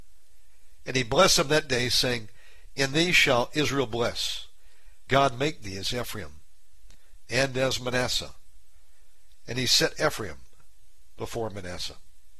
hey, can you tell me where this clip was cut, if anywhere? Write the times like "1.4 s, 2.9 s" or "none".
5.1 s